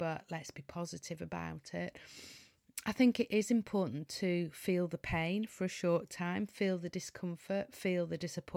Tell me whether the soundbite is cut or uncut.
uncut